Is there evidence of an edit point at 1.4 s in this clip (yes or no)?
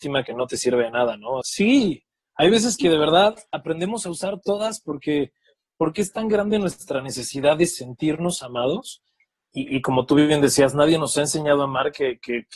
yes